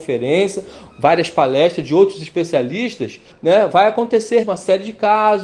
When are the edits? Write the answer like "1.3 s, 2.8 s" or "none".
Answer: 3.3 s, 4.4 s